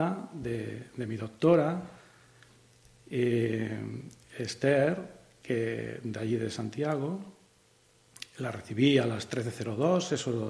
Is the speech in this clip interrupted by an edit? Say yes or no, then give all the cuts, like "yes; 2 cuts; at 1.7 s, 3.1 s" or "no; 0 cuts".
no; 0 cuts